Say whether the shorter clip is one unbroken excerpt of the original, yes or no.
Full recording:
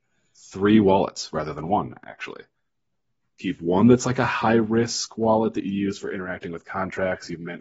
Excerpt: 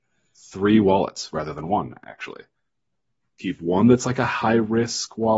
yes